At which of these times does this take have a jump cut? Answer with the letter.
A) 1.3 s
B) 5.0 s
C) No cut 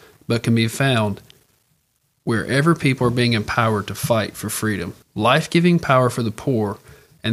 B